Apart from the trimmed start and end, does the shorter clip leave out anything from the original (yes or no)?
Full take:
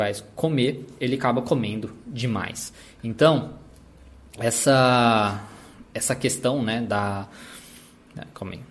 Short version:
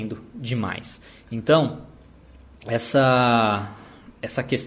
no